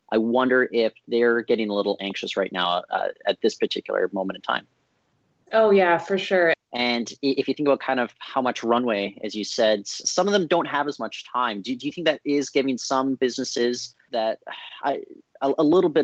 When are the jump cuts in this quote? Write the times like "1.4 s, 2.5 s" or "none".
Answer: 6.5 s, 10.0 s, 14.1 s